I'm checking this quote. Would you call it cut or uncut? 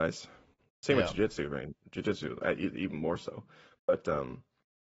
uncut